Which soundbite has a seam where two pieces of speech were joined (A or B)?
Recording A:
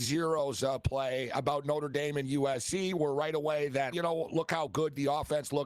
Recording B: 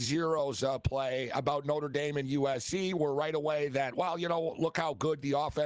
A